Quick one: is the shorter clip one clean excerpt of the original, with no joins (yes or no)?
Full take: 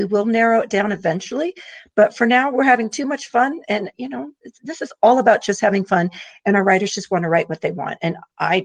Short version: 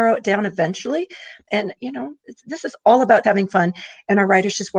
no